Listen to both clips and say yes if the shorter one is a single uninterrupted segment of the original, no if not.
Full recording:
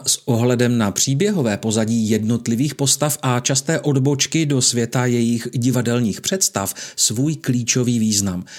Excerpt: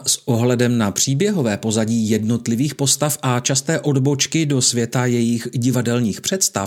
yes